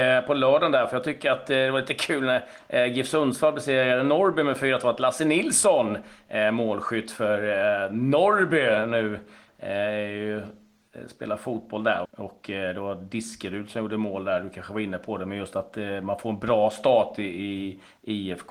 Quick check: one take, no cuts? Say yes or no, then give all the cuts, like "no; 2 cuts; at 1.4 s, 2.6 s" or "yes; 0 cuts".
no; 1 cut; at 12.0 s